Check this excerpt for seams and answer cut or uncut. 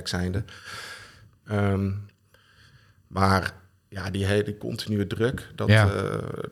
cut